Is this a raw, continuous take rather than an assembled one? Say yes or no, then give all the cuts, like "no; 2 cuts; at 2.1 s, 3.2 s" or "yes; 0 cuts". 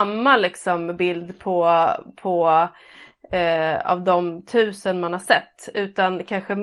yes; 0 cuts